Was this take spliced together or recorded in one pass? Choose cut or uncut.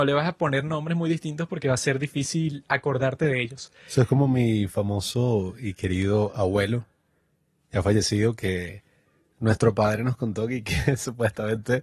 uncut